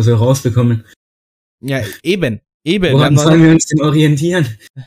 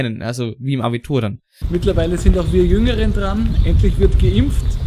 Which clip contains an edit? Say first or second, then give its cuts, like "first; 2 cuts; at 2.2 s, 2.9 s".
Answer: second; 1 cut; at 1.6 s